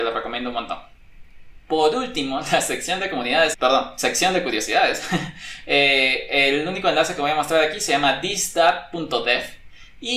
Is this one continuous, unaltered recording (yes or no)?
no